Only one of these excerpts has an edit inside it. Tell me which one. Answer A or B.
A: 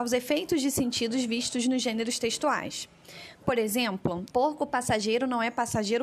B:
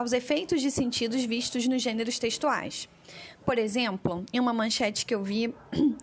A